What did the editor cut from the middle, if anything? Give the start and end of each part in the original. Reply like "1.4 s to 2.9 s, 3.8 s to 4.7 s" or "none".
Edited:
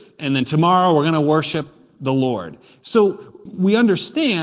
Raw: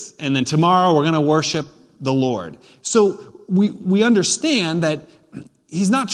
3.5 s to 3.7 s